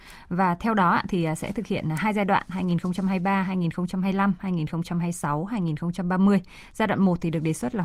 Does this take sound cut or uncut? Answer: uncut